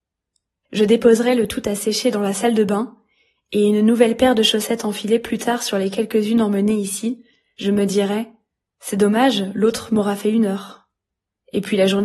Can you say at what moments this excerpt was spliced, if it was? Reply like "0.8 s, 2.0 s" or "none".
none